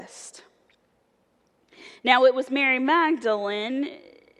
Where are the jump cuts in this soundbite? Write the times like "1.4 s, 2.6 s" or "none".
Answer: none